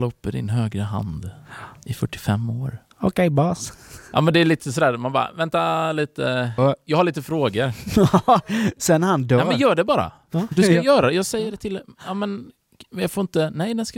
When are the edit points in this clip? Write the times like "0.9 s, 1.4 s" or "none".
6.6 s